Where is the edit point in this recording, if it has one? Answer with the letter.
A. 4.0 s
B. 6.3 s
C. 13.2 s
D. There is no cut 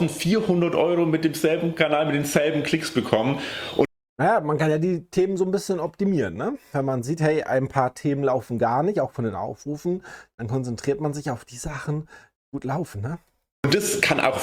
D